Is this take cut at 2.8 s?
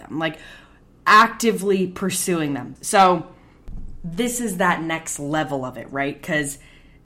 yes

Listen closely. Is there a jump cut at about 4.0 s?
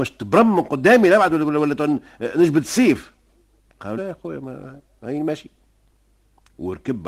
yes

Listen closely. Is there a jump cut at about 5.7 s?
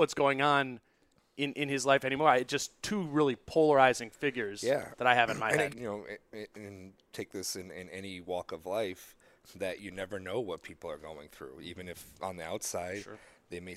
yes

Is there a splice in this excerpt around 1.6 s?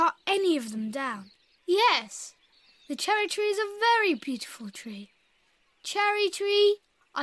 yes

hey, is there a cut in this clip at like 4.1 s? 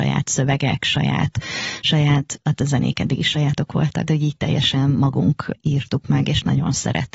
yes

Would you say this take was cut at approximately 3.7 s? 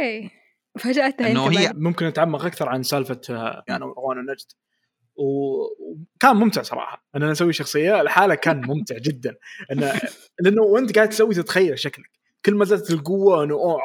yes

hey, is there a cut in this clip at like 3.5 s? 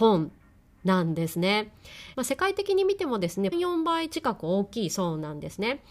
yes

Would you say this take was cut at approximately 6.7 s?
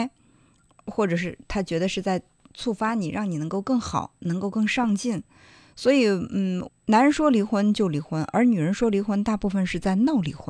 yes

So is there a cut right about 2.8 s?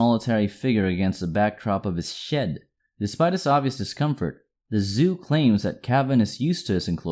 yes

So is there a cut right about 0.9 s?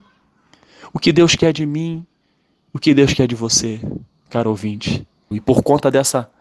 no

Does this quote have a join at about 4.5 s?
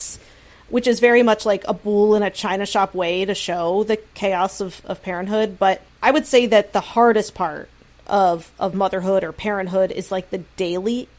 no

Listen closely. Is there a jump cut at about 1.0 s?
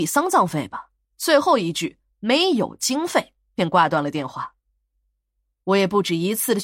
yes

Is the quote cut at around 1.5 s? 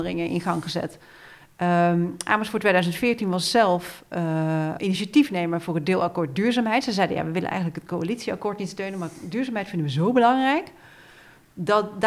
no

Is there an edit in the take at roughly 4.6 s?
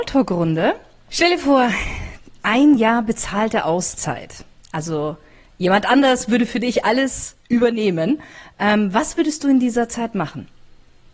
no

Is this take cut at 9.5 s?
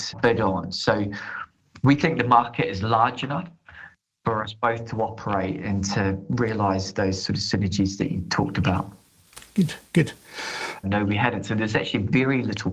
no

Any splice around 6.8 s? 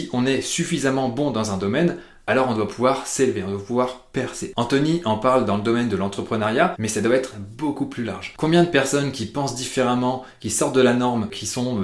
yes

